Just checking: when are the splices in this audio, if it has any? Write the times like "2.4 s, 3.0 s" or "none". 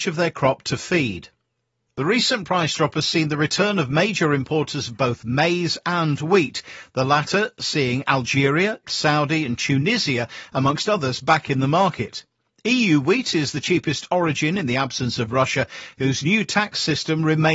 8.8 s